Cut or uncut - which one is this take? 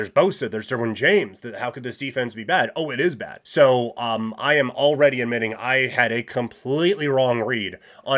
cut